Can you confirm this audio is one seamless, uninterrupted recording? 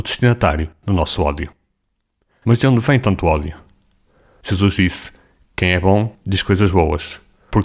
yes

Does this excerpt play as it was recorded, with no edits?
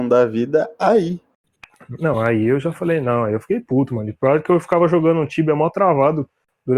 yes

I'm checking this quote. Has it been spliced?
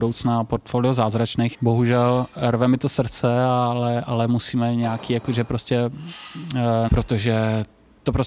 yes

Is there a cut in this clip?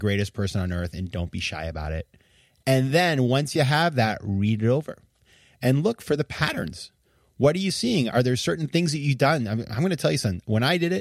no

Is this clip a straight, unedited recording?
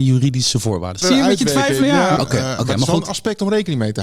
no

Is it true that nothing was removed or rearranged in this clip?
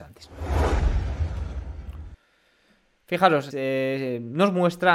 no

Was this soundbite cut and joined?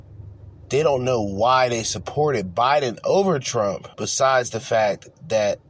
yes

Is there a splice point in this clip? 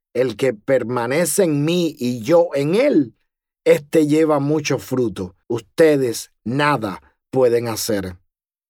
yes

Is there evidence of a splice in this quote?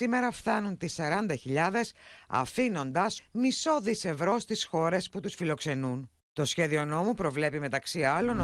yes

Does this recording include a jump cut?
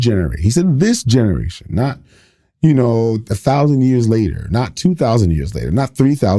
no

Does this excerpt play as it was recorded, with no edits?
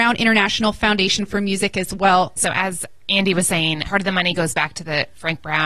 no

